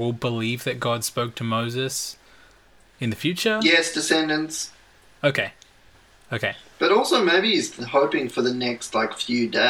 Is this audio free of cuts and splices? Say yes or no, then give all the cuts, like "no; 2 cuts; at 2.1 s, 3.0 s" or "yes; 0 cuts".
yes; 0 cuts